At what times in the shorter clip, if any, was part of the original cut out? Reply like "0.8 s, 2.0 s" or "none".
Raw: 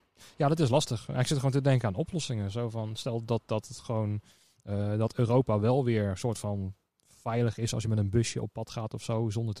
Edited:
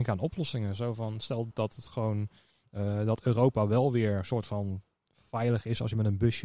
1.5 s